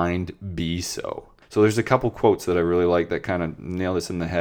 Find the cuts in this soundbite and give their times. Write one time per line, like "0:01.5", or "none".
0:01.4

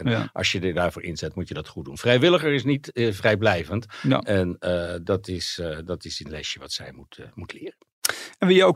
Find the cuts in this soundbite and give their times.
none

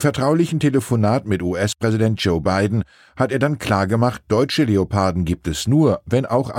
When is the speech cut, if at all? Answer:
none

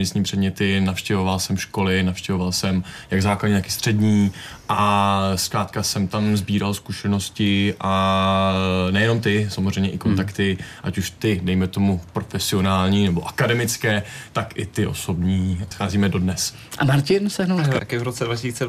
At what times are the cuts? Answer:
0:15.7
0:17.8

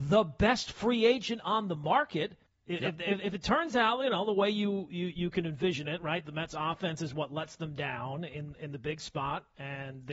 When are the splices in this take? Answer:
0:02.5

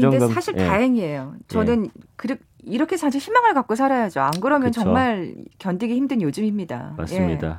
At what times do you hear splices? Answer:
0:02.0

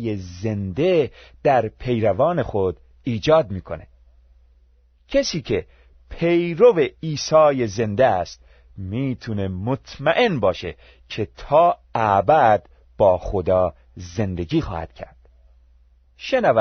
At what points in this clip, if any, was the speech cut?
none

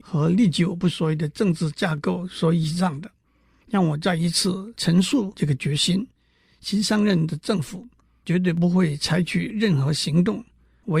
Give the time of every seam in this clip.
none

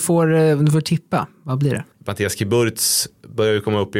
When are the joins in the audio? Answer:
0:01.9

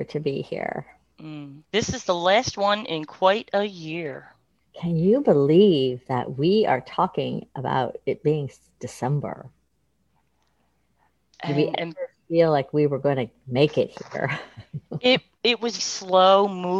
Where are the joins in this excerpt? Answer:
0:01.6
0:15.8

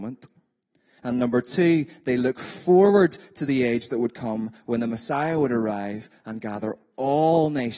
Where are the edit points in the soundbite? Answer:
0:01.0

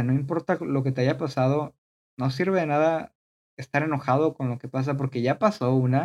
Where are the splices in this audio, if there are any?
none

